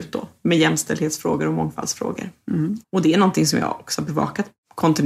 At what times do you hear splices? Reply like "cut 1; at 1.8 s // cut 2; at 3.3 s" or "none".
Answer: cut 1; at 2.8 s